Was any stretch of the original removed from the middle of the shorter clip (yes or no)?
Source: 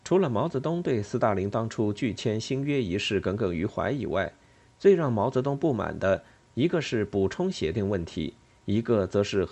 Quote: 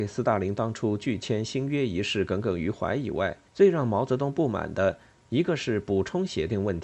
yes